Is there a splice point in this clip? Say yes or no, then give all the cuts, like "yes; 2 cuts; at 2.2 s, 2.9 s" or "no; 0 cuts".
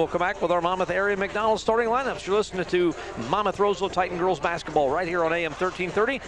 no; 0 cuts